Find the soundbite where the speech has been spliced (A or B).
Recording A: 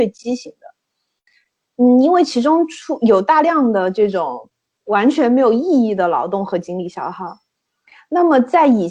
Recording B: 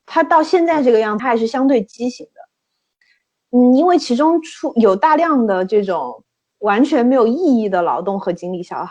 B